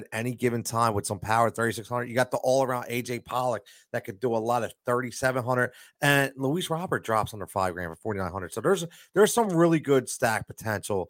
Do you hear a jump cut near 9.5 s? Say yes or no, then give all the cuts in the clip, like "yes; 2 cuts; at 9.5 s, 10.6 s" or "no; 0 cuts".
no; 0 cuts